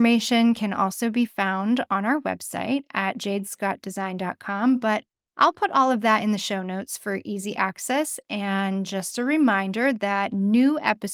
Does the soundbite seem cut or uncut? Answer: uncut